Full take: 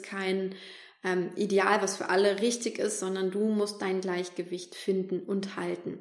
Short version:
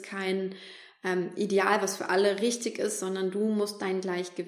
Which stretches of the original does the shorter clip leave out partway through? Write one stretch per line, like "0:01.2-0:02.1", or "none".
none